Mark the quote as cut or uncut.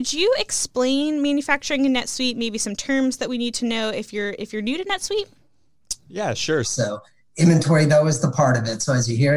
cut